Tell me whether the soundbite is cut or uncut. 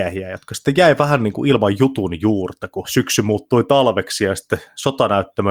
cut